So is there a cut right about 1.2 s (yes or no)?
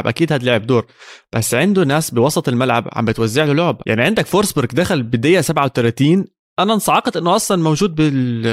no